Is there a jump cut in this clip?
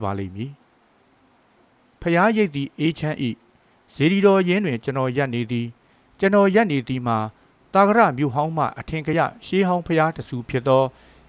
no; 0 cuts

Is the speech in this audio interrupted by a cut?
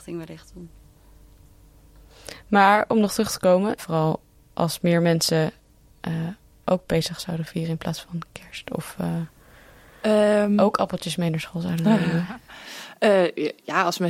yes; 1 cut; at 3.8 s

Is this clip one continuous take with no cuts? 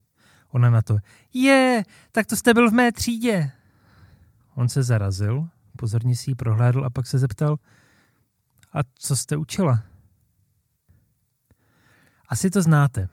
yes; 0 cuts

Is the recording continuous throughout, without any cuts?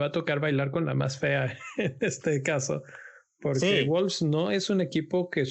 yes; 0 cuts

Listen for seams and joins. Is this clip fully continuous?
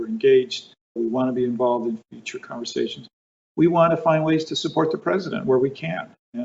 no; 1 cut; at 1.0 s

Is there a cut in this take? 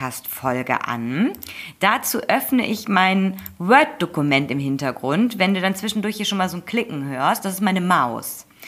no; 0 cuts

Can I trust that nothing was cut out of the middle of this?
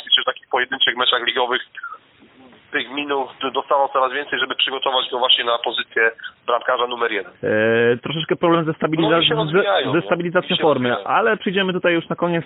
no; 1 cut; at 7.3 s

